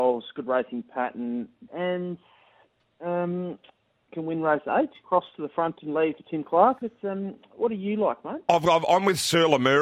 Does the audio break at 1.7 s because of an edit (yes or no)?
yes